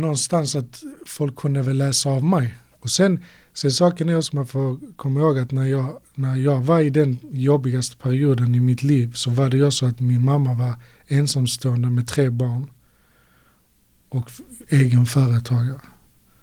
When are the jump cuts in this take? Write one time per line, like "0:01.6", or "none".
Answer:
0:02.7